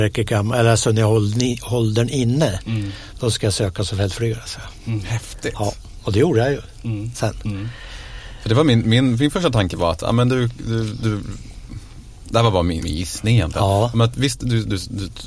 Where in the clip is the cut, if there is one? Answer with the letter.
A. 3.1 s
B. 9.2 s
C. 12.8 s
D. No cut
C